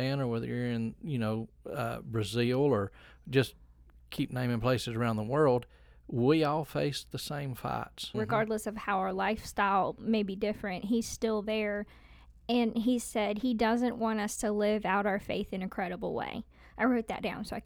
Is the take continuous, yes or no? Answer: no